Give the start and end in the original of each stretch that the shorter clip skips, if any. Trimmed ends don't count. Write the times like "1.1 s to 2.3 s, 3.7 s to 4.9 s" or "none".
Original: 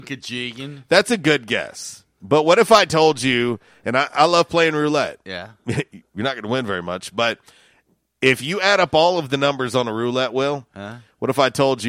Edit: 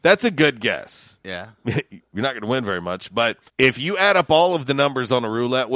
2.1 s to 5.2 s, 7.5 s to 8.1 s

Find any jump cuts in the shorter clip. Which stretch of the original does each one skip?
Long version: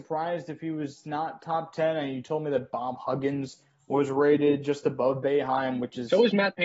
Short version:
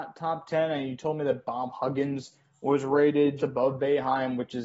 4.6 s to 4.8 s

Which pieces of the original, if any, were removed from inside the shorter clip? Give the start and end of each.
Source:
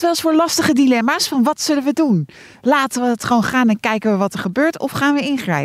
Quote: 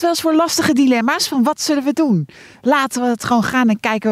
none

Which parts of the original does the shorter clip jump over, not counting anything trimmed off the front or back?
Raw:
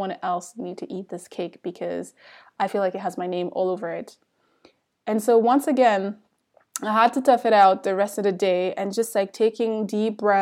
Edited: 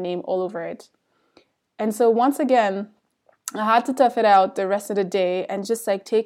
none

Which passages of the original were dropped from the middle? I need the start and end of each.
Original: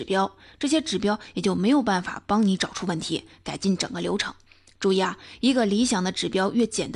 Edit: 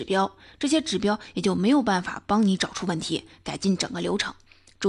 none

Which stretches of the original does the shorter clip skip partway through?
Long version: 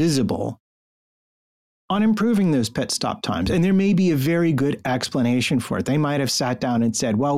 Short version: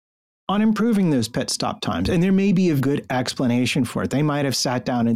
4.2 s to 4.5 s

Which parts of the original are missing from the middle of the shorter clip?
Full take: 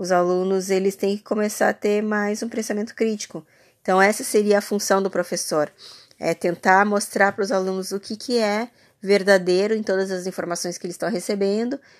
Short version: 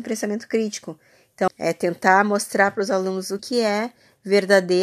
3.9 s to 6.1 s, 8.0 s to 8.2 s

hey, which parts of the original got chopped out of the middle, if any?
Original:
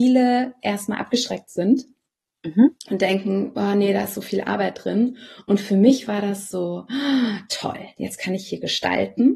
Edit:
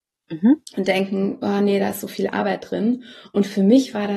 none

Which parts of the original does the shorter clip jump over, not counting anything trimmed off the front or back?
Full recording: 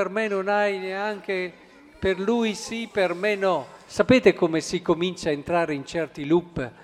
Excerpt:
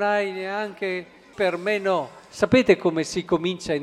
1.8 s to 2.9 s

